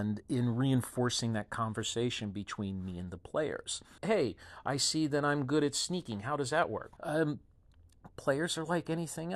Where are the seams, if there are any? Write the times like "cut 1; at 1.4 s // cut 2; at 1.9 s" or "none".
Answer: cut 1; at 4.0 s // cut 2; at 7.0 s